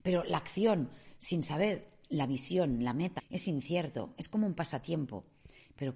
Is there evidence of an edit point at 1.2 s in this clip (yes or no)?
no